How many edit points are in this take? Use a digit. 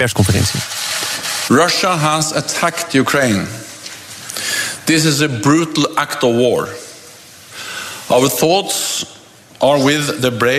1